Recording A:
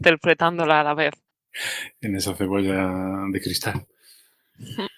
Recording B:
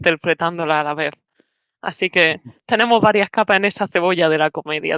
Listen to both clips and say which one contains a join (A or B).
A